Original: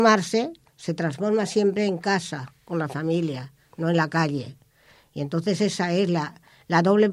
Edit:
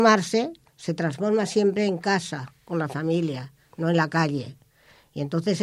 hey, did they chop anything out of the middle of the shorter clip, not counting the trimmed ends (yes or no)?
no